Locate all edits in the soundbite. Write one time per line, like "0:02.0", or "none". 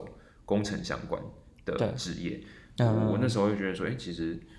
0:02.8